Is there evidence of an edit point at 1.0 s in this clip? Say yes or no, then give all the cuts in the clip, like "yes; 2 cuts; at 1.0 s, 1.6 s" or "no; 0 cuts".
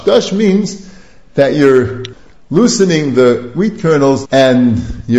no; 1 cut; at 4.2 s